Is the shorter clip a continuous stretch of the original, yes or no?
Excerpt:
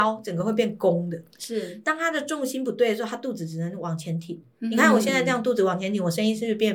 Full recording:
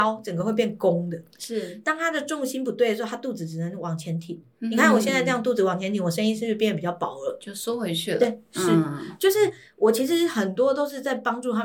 yes